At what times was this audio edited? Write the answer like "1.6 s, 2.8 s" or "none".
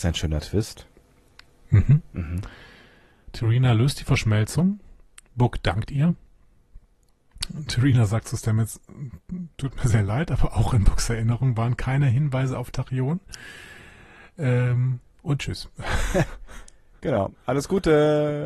none